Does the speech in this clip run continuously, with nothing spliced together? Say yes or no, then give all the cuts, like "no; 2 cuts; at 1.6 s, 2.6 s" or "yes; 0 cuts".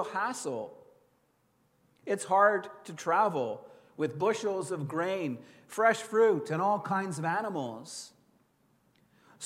yes; 0 cuts